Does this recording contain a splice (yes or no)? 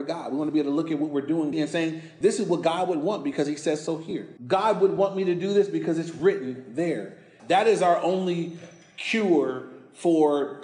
yes